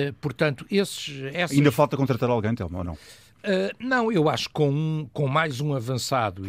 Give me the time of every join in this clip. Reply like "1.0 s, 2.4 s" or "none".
none